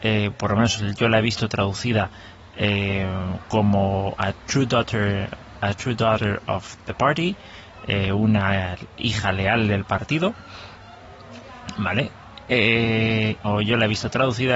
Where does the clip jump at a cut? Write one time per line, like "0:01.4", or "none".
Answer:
0:13.4